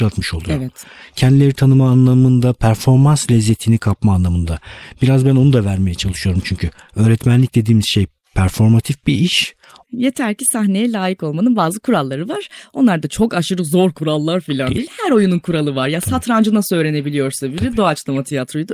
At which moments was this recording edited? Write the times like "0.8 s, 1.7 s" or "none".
9.8 s